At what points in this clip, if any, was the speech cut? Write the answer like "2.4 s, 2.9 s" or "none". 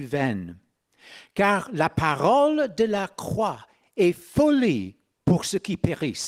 none